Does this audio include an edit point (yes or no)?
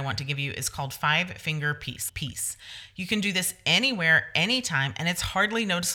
yes